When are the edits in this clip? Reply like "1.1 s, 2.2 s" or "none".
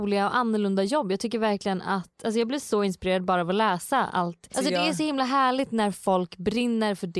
4.5 s